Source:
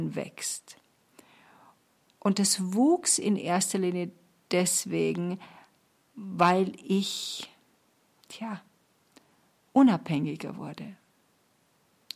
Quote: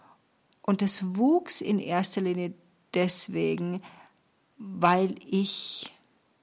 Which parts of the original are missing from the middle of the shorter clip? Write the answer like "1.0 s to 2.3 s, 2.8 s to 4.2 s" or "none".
none